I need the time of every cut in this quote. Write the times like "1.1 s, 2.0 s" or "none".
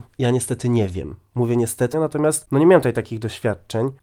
1.9 s